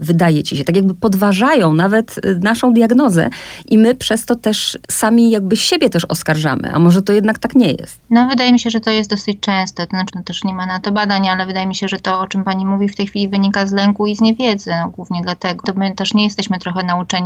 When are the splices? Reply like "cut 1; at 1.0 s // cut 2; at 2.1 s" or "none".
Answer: cut 1; at 10.1 s // cut 2; at 15.6 s